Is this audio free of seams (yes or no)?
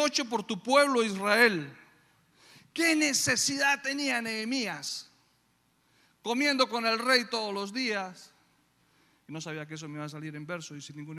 yes